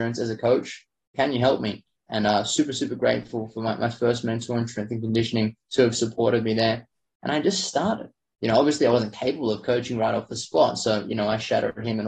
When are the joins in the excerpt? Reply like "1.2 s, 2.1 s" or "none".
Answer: 1.1 s